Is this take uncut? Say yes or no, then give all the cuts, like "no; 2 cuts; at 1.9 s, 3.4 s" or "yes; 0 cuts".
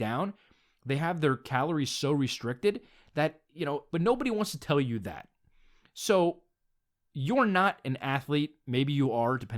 no; 1 cut; at 3.9 s